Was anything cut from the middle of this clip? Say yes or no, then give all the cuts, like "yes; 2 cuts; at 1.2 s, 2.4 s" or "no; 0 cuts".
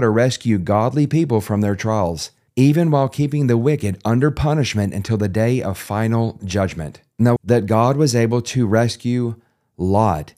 yes; 1 cut; at 7.4 s